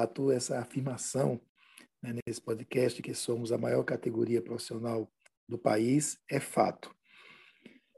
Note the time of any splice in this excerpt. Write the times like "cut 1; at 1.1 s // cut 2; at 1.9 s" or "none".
none